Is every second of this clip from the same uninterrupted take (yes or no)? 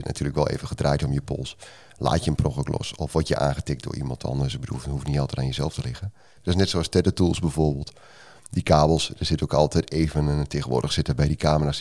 no